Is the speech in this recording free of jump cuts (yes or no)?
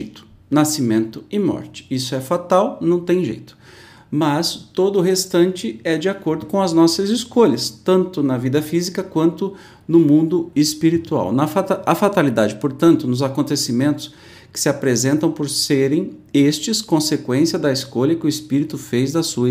yes